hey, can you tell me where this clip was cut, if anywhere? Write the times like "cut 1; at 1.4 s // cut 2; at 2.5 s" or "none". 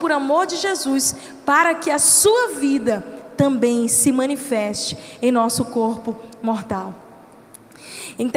none